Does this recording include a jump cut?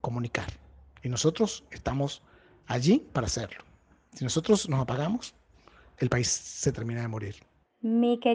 no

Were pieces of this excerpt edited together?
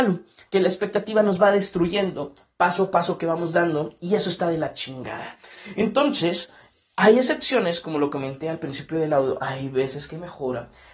no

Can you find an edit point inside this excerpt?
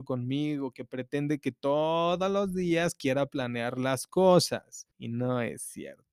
yes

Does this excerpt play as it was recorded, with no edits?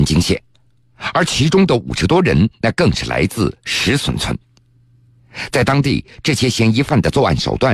yes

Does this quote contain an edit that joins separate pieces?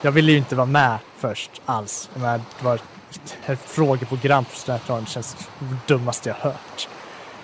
yes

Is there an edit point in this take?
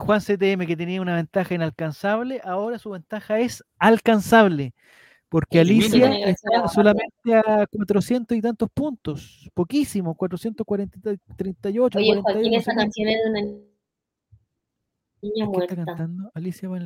no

